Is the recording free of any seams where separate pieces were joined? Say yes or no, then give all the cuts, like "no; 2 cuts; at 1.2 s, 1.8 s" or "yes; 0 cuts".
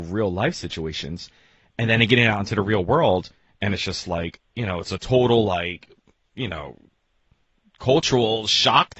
yes; 0 cuts